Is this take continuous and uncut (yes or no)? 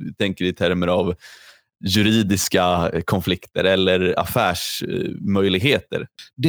no